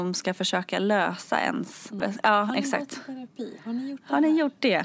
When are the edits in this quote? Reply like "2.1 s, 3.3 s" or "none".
2.0 s